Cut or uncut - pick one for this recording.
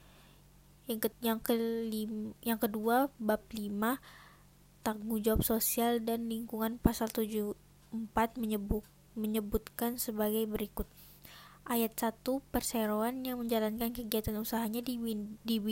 cut